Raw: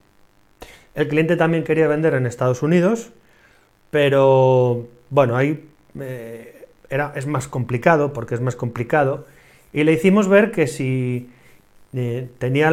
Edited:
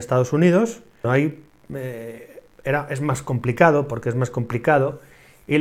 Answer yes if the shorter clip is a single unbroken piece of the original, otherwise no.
no